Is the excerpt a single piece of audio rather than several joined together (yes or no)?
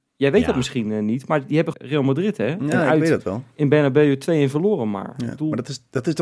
no